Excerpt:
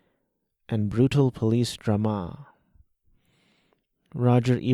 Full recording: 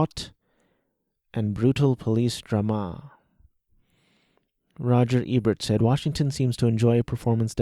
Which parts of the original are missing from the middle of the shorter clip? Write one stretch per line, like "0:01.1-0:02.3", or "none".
none